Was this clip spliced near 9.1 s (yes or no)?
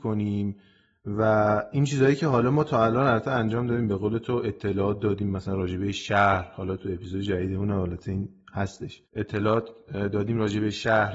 yes